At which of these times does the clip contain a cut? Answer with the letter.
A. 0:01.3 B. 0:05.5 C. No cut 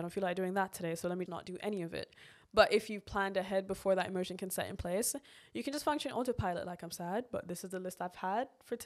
A